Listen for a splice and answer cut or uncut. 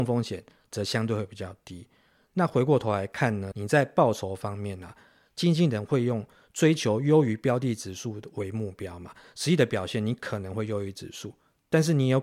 cut